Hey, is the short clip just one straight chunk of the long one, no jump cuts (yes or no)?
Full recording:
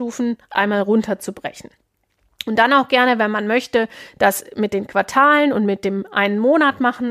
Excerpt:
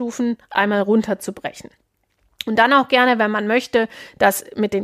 yes